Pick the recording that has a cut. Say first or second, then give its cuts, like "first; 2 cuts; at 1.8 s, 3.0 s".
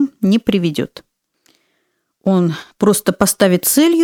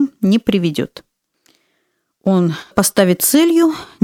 second; 1 cut; at 2.7 s